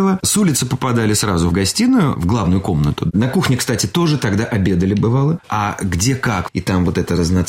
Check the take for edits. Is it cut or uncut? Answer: cut